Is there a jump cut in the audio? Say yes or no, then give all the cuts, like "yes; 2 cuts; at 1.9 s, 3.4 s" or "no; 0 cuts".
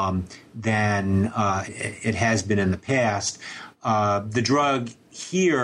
yes; 1 cut; at 1.7 s